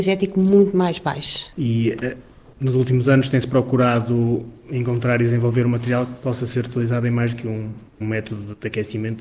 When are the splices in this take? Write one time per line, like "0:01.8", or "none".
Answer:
0:01.5
0:07.9